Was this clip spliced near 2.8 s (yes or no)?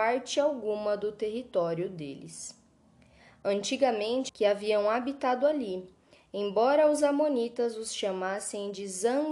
no